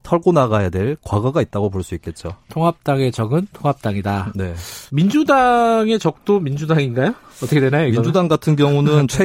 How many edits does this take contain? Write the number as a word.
one